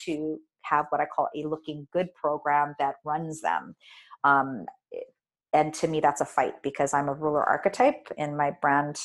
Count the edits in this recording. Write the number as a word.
one